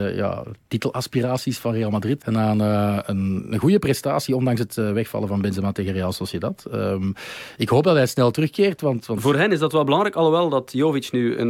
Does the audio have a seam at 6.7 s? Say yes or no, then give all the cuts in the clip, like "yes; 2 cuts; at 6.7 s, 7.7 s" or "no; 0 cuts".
no; 1 cut; at 2.2 s